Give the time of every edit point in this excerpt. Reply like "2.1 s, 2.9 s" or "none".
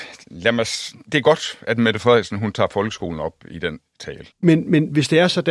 4.3 s

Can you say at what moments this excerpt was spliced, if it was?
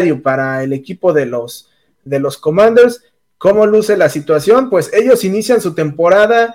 none

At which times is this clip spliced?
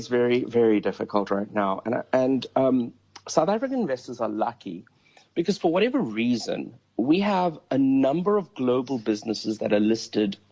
none

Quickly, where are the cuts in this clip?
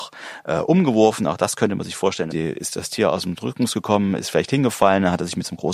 2.3 s

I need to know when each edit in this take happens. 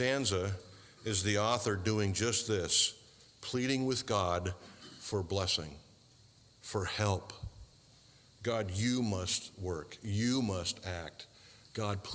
none

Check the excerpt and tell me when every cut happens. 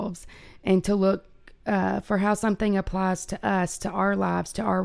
none

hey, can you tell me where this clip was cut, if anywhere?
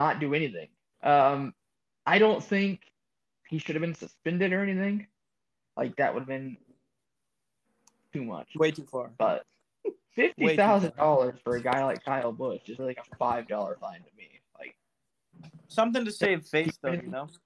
0.9 s, 12.8 s

